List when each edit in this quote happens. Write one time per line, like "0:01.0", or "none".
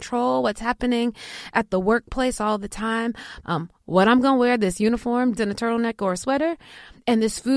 0:03.4
0:05.4